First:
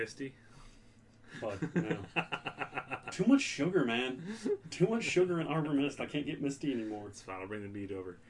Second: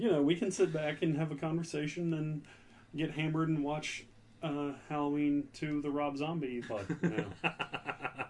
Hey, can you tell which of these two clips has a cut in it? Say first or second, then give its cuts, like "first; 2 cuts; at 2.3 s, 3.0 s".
second; 1 cut; at 6.6 s